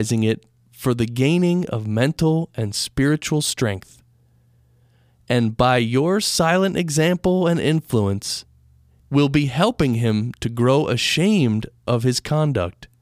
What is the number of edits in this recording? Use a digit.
1